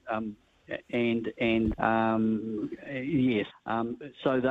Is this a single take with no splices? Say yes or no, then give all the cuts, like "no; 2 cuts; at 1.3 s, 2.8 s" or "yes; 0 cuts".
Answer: no; 2 cuts; at 1.7 s, 3.5 s